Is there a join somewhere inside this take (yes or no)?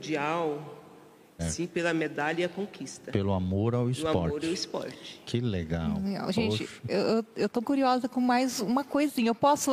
yes